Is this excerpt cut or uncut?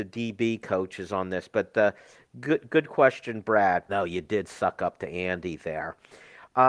cut